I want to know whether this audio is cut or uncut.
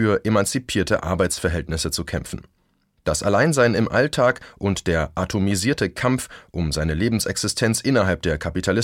uncut